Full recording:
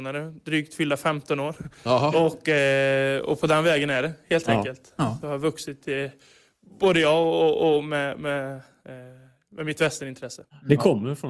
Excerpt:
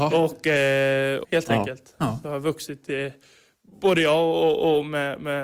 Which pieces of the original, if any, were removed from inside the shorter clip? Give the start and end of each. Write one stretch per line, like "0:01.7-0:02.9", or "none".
0:03.3-0:04.2

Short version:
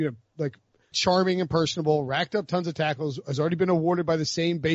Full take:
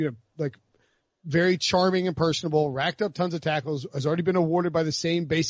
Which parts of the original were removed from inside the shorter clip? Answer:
0:00.9-0:01.6

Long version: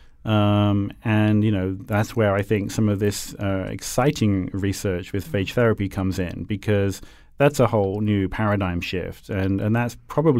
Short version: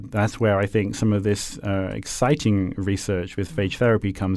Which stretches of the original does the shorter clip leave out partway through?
none

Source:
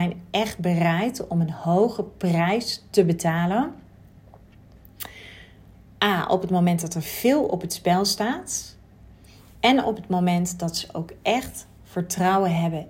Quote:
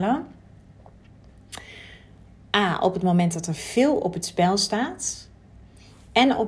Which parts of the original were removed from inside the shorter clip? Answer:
none

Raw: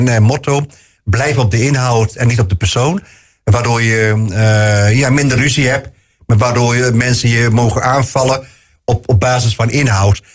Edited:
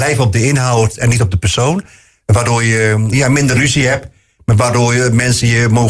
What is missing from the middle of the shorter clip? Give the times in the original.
0:04.3-0:04.9

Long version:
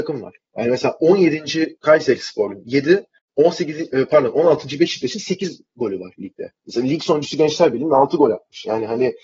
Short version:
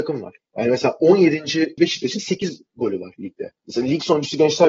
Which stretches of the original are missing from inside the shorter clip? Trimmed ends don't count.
0:01.8-0:04.8

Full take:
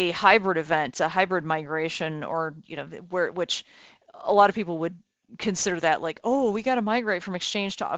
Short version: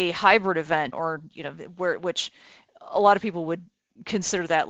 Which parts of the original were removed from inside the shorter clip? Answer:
0:00.9-0:02.3

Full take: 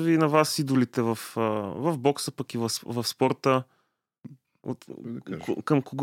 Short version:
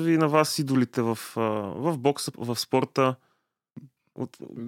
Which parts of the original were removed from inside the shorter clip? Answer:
0:02.3-0:02.8

